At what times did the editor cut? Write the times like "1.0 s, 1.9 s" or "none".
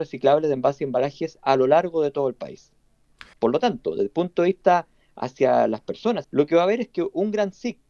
3.3 s, 6.2 s